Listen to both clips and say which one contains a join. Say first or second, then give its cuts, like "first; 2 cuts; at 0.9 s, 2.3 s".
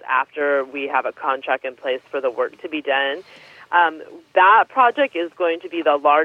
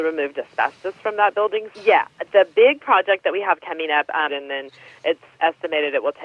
second; 2 cuts; at 1.7 s, 4.3 s